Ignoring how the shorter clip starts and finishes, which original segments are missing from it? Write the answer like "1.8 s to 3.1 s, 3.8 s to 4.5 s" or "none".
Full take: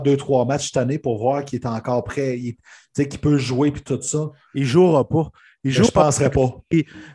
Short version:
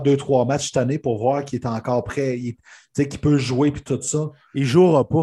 none